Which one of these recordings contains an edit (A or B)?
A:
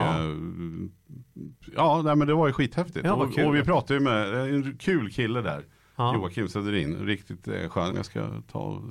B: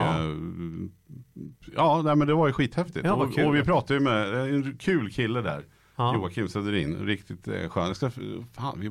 A